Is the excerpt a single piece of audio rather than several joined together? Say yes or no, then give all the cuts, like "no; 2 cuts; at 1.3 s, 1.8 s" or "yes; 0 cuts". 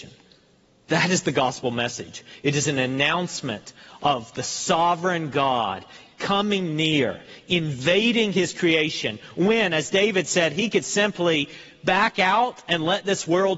yes; 0 cuts